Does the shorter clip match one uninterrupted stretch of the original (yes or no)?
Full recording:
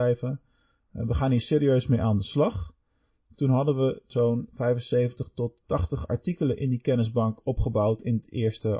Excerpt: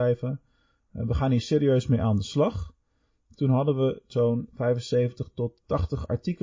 yes